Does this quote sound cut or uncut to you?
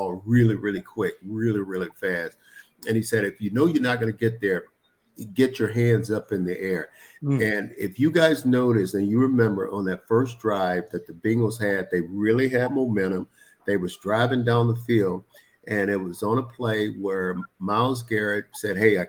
uncut